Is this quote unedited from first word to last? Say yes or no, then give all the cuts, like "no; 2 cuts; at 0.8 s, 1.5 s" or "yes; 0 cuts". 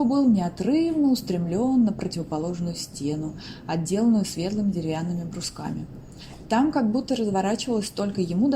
yes; 0 cuts